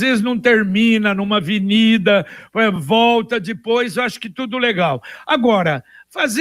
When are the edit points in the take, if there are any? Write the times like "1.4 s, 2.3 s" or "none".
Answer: none

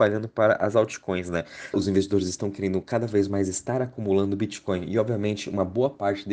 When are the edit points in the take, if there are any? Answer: 1.7 s

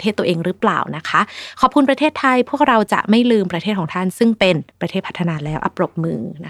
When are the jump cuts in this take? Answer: 4.7 s

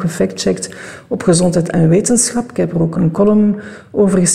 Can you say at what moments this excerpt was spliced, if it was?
2.9 s

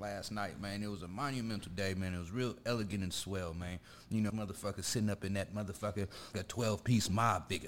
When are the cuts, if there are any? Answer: 4.3 s, 6.3 s

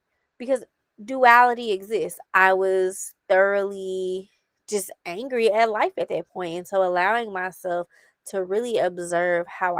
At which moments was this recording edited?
2.2 s

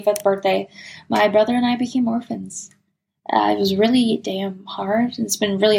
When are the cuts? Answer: none

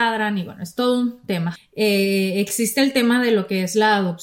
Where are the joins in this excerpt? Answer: 1.6 s

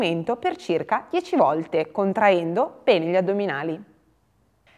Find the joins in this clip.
none

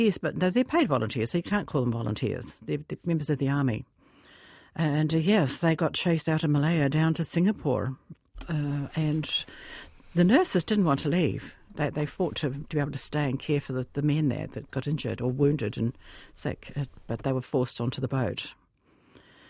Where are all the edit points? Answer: none

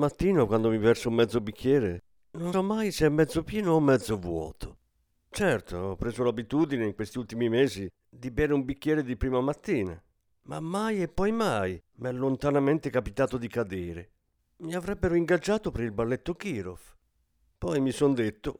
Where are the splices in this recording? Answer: 2.5 s, 5.1 s, 14.4 s

